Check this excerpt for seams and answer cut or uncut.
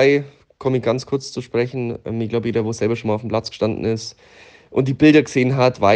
cut